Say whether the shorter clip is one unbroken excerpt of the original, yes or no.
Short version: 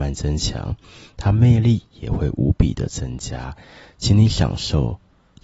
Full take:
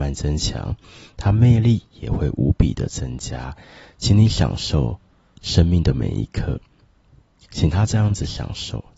yes